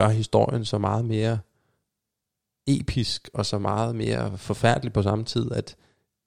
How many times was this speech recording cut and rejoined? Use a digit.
0